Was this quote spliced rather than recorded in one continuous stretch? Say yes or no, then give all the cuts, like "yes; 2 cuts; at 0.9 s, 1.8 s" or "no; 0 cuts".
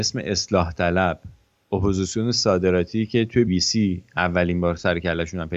yes; 1 cut; at 3.5 s